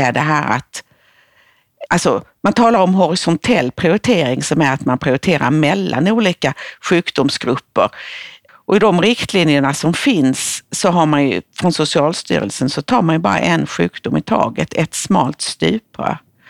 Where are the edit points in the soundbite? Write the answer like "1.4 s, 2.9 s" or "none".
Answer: 1.9 s, 8.5 s

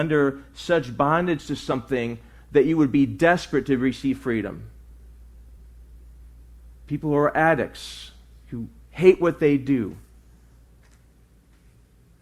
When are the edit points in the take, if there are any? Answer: none

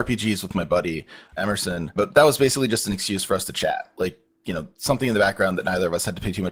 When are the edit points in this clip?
2.0 s

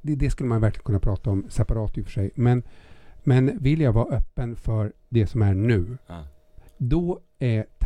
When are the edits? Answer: 6.7 s

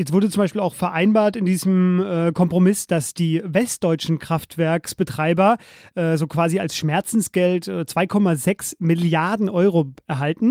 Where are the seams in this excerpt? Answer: none

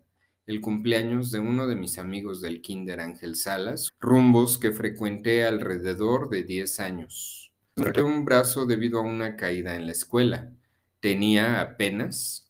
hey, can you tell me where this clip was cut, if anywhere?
3.9 s, 7.6 s

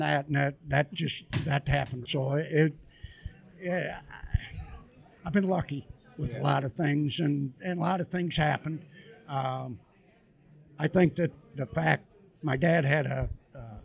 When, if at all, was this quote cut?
2.0 s

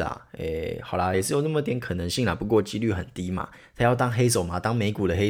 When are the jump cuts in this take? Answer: 1.1 s

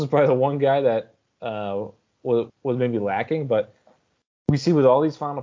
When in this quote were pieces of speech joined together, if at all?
2.5 s

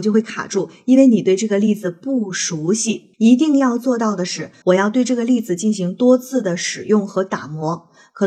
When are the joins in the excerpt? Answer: 3.1 s, 4.6 s

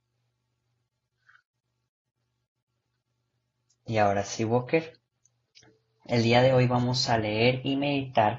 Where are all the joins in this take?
none

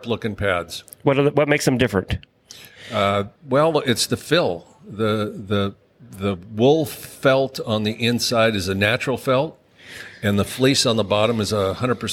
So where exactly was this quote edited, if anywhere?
3.4 s

